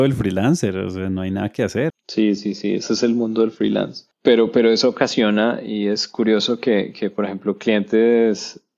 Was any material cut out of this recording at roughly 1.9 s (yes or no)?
yes